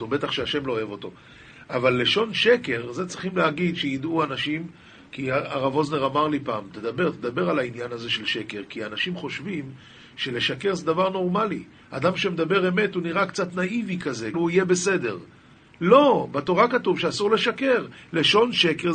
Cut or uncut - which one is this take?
cut